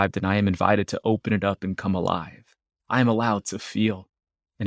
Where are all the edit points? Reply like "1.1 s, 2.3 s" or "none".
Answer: none

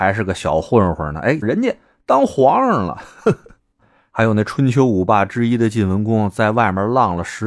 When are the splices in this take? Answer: 1.4 s

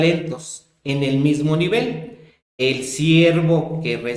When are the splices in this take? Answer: 2.4 s

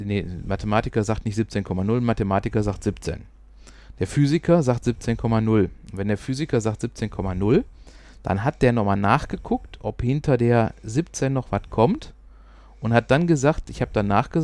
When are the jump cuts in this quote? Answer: none

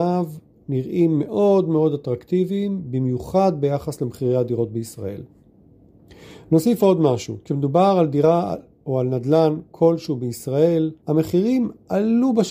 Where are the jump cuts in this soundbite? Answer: 7.4 s, 11.0 s

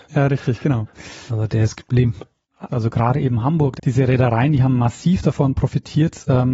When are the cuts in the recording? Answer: 2.7 s, 3.8 s

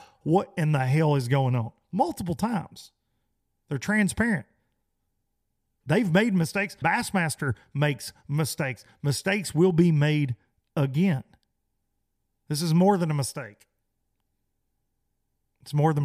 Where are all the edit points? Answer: 6.8 s

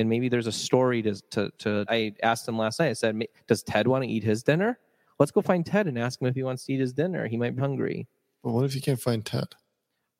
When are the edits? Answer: 1.9 s, 7.6 s

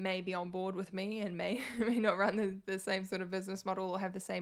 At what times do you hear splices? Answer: none

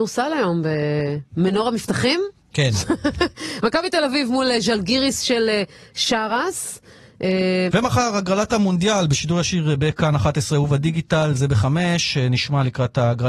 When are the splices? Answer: 7.7 s

